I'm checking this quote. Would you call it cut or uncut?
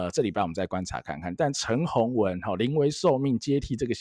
uncut